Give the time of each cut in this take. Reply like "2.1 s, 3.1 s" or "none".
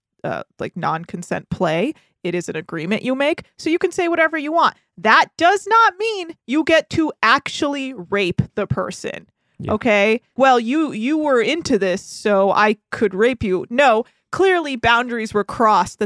10.4 s